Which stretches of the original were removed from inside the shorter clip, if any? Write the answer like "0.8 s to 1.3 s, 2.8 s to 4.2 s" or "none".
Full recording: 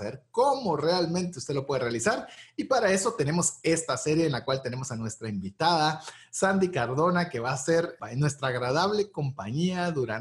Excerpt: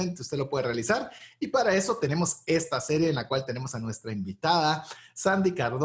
none